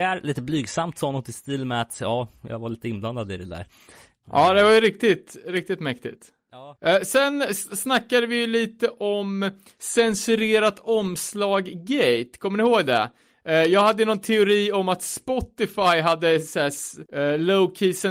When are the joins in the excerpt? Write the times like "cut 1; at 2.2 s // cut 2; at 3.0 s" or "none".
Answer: cut 1; at 4.2 s